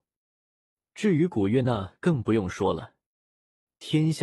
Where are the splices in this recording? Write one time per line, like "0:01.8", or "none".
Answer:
none